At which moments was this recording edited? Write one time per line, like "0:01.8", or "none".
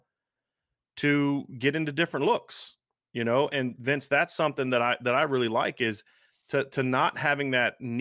0:03.5